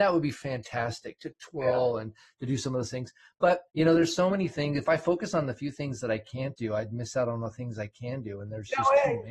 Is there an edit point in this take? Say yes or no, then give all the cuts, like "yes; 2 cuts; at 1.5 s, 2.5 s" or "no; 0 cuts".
yes; 1 cut; at 3.7 s